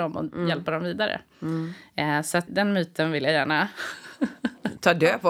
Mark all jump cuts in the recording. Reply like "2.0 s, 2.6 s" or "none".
2.5 s